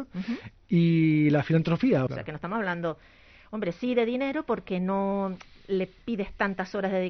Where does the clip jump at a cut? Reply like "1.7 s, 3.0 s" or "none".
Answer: 2.1 s

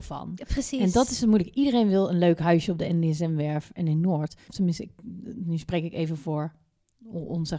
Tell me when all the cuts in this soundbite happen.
4.5 s

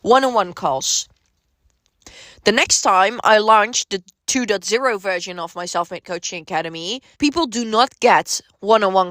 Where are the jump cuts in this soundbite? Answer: 7.1 s

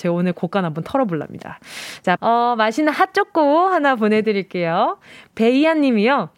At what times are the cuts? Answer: 2.2 s

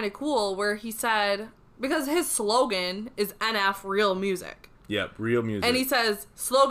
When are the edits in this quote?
none

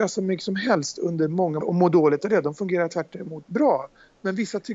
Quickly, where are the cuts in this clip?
1.6 s

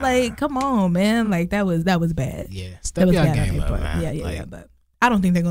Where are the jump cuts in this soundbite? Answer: none

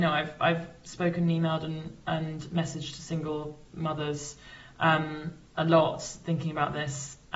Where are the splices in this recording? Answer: none

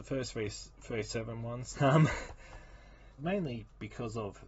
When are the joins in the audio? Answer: 1.7 s, 3.2 s

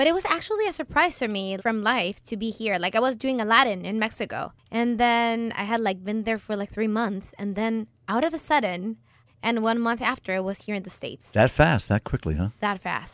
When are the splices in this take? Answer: 1.6 s, 9.3 s

